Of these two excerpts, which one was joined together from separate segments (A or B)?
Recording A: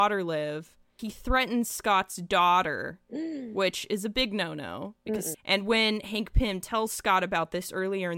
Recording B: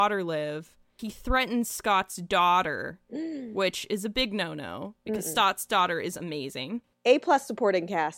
A